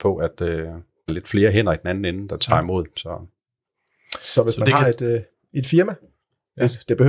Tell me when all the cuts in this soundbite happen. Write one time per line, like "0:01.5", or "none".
0:01.1